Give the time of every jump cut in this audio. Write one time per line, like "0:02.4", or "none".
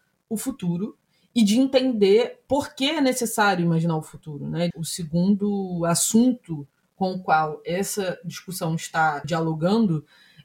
0:04.7
0:09.2